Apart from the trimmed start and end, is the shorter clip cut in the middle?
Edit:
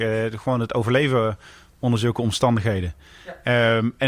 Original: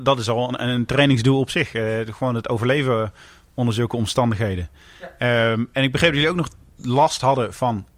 no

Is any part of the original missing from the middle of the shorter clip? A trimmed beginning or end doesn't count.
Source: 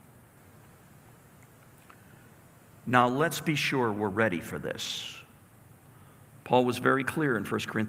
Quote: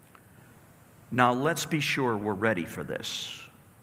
no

